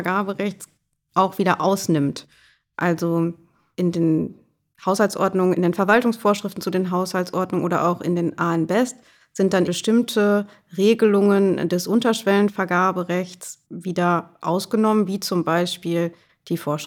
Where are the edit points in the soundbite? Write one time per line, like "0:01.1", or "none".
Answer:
0:09.7
0:13.7

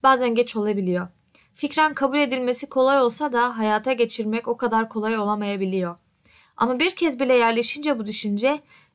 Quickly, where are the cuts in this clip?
none

